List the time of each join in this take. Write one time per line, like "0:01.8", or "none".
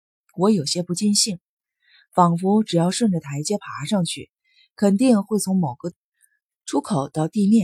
none